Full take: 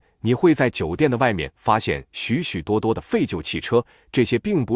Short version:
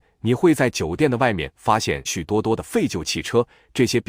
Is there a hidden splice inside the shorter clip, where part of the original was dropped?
yes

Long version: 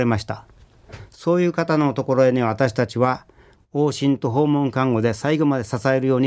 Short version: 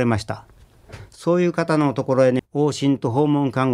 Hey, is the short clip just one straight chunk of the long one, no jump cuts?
no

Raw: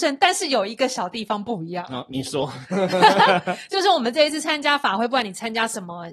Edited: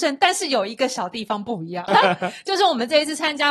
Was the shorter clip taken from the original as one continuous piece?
no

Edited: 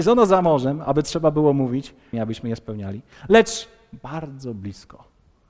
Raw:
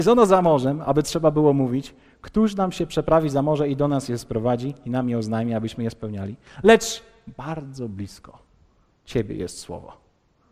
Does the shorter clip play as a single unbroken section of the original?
no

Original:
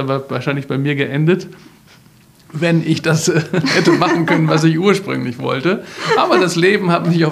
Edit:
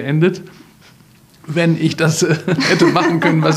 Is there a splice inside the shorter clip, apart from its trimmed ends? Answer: no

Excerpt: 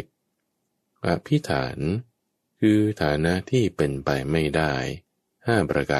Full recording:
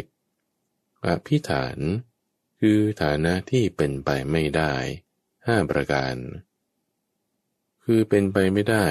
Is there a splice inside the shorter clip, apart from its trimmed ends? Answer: no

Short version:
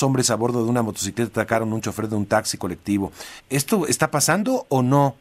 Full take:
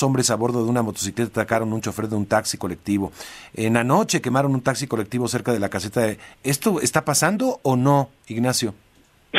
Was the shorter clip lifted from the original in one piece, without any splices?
no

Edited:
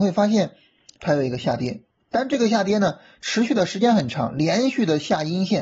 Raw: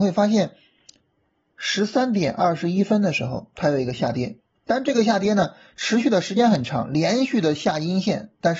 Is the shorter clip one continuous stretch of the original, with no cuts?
no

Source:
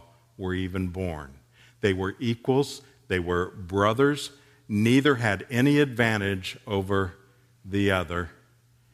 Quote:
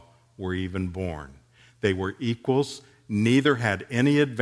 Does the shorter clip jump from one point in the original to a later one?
yes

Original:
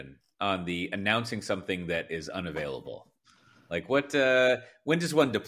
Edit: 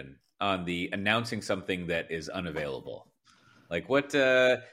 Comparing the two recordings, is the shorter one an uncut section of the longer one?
yes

